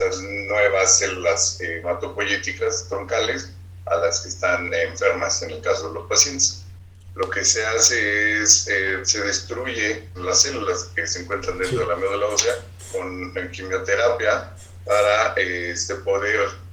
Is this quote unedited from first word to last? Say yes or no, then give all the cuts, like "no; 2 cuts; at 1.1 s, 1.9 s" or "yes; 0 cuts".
no; 1 cut; at 7.1 s